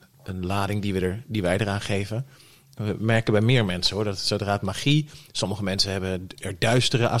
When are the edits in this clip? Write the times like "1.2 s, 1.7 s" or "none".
none